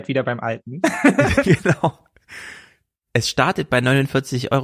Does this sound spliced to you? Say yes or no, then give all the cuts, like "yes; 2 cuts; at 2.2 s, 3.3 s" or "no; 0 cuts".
no; 0 cuts